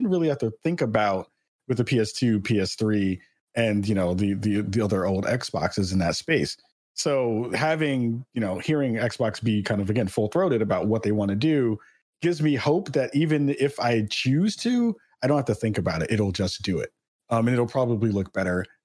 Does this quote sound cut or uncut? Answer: uncut